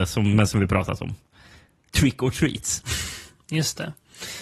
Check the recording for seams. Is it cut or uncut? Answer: uncut